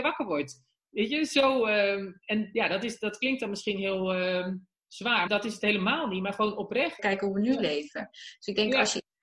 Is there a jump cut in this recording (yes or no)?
yes